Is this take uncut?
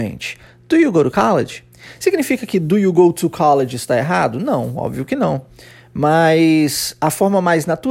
yes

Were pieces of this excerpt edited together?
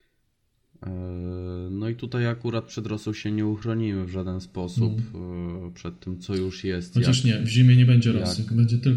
no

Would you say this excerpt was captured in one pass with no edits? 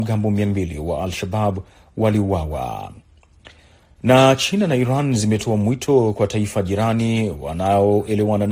yes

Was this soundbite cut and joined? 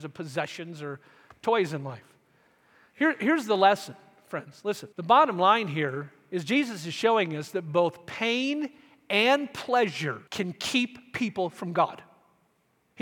yes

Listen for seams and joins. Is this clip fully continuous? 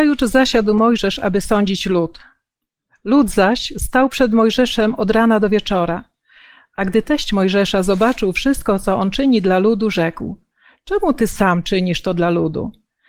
yes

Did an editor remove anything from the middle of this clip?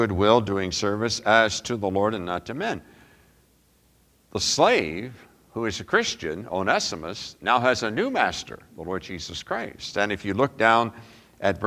no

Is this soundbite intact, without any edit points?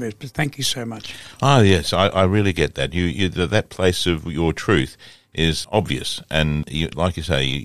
yes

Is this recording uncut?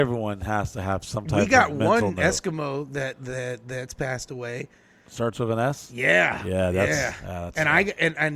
yes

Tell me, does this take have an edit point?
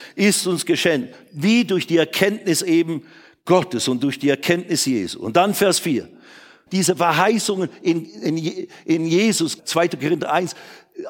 yes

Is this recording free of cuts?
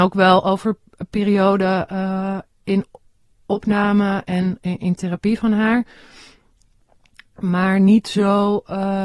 yes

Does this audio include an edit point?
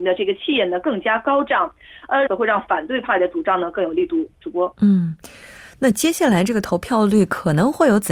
yes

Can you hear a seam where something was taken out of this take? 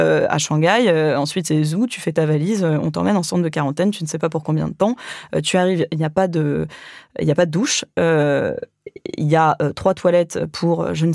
no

